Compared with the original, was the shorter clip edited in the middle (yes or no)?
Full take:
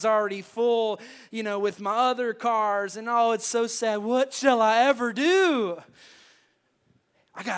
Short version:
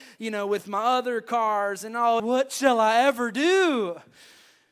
yes